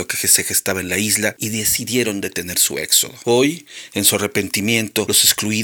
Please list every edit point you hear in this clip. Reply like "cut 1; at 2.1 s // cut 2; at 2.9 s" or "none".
none